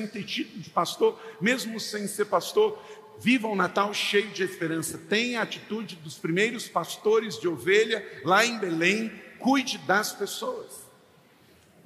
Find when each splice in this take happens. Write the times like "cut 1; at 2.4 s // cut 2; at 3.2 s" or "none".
none